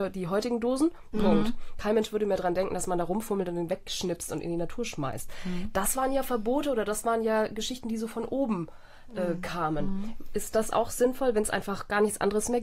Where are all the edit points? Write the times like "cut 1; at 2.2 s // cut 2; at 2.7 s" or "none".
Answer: cut 1; at 1.1 s